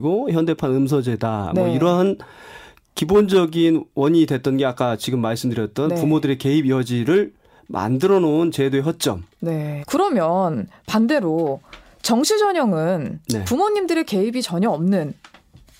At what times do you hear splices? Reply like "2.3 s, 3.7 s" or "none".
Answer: 9.8 s